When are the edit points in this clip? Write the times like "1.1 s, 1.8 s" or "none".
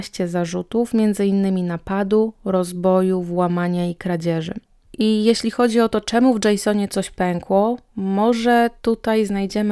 none